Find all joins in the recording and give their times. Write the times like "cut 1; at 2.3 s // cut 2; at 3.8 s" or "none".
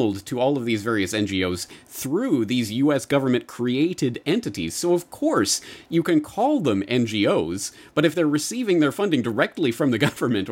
none